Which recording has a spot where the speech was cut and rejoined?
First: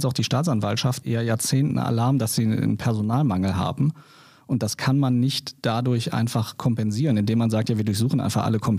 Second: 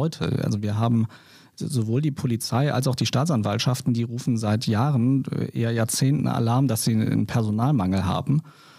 first; 1 cut; at 1.0 s

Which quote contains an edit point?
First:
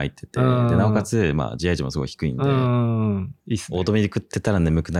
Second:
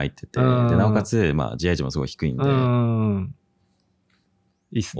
first; 1 cut; at 3.4 s

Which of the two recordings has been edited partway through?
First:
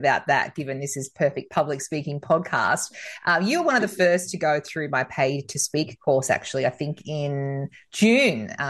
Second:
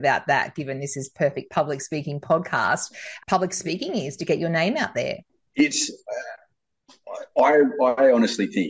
second; 1 cut; at 3.2 s

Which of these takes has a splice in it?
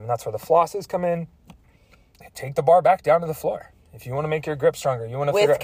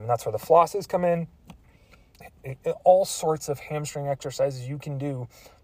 first; 1 cut; at 2.3 s

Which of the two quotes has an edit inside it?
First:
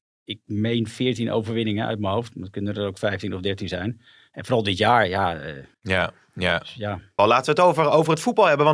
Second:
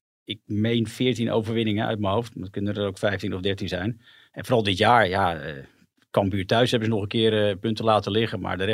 first; 2 cuts; at 5.7 s, 7.2 s

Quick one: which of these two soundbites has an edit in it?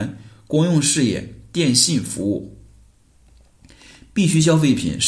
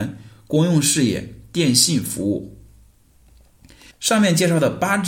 second; 1 cut; at 3.9 s

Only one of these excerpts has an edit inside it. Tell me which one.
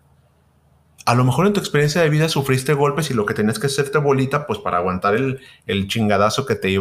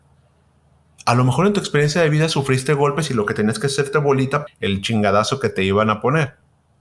second; 1 cut; at 4.5 s

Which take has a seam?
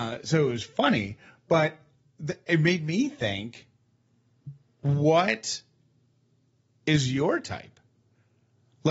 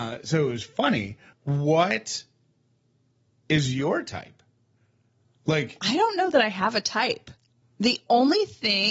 second; 2 cuts; at 1.3 s, 7.6 s

